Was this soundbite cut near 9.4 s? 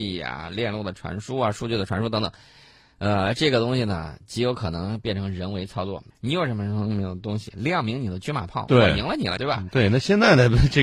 yes; 2 cuts; at 6.1 s, 9.4 s

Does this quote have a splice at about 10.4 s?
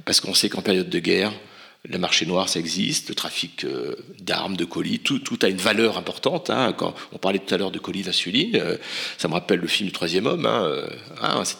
no; 0 cuts

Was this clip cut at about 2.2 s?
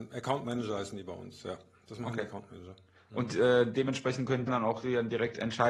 no; 1 cut; at 4.5 s

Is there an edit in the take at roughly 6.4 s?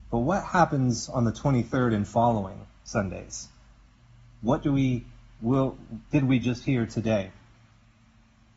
no; 0 cuts

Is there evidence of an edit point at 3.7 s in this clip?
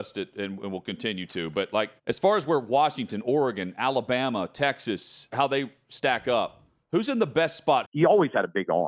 no; 3 cuts; at 2.0 s, 5.3 s, 7.8 s

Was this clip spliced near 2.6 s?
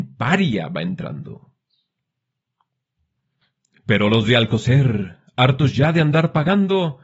no; 0 cuts

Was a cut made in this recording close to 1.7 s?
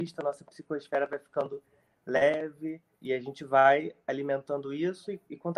no; 1 cut; at 3.0 s

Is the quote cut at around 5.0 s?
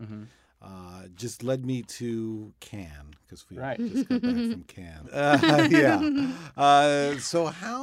yes; 1 cut; at 5.0 s

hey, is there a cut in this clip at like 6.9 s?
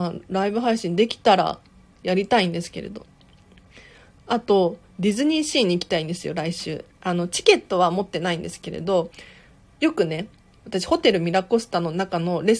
yes; 1 cut; at 6.9 s

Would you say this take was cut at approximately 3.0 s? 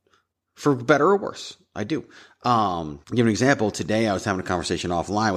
yes; 1 cut; at 3.0 s

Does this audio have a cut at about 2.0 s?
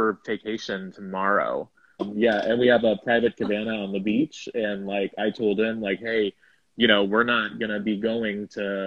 yes; 1 cut; at 2.0 s

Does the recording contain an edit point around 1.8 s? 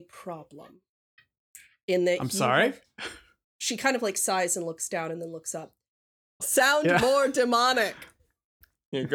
no; 2 cuts; at 3.4 s, 6.4 s

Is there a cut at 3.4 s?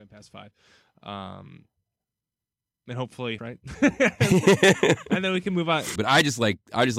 yes; 2 cuts; at 3.4 s, 6.0 s

